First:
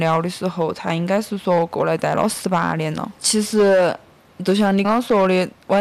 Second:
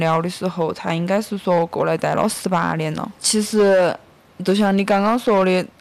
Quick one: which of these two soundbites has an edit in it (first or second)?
first